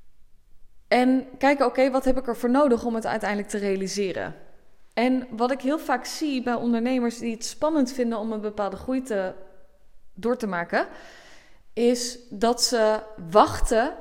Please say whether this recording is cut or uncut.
uncut